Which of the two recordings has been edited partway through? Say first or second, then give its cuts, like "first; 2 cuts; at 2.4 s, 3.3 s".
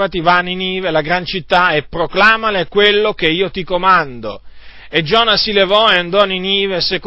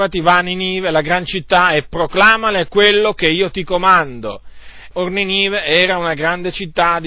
second; 1 cut; at 4.9 s